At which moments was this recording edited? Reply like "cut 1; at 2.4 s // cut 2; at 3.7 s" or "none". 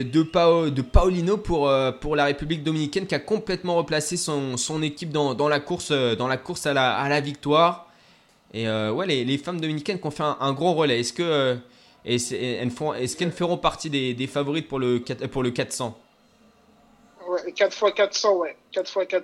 cut 1; at 15.0 s